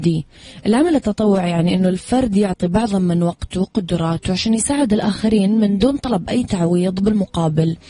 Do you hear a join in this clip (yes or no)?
no